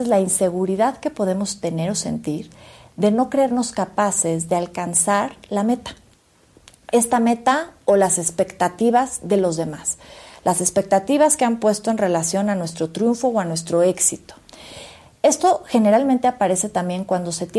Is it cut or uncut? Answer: uncut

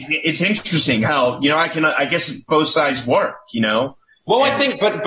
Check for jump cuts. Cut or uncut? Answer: uncut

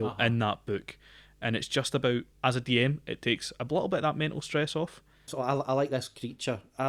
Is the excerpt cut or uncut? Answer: cut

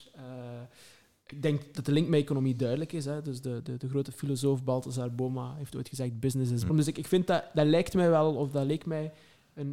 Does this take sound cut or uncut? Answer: cut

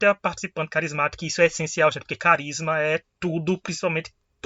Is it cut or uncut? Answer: uncut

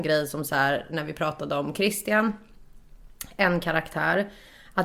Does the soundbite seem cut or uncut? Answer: uncut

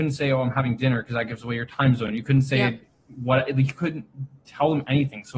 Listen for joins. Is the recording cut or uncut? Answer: uncut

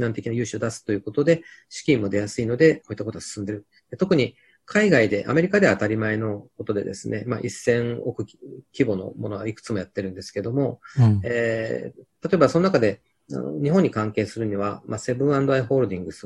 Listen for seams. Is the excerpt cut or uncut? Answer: uncut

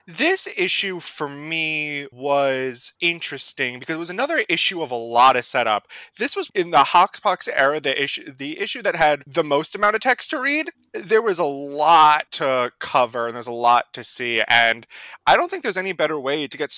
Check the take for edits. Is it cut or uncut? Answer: cut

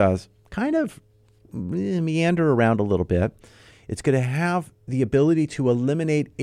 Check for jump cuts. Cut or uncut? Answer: cut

